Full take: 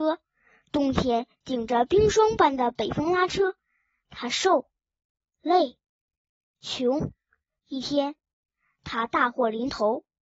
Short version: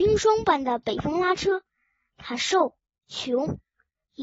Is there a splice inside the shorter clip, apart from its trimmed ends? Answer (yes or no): yes